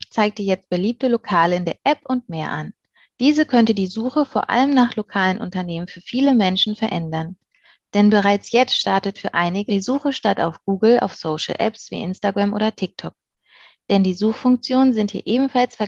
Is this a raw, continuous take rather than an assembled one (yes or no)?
no